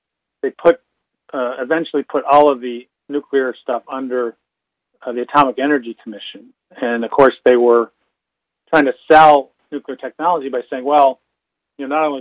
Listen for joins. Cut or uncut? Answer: uncut